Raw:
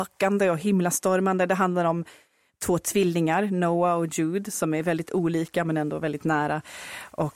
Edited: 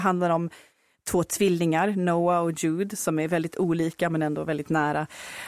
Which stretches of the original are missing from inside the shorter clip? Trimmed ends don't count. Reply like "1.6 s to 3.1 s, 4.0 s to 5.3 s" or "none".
none